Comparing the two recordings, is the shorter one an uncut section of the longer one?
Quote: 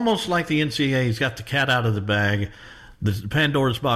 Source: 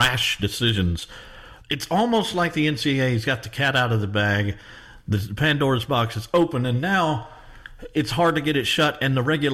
yes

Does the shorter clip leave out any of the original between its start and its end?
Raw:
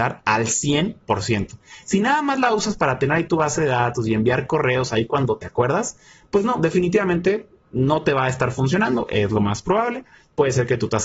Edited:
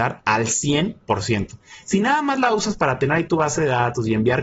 no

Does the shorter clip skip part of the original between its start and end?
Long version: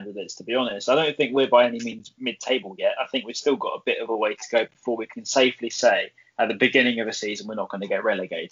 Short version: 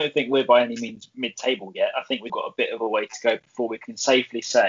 yes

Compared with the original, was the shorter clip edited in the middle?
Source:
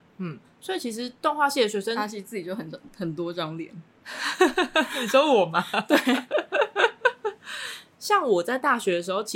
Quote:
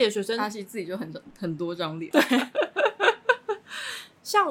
yes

